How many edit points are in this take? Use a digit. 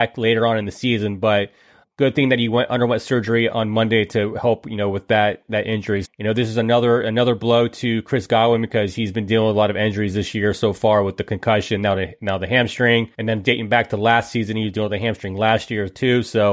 3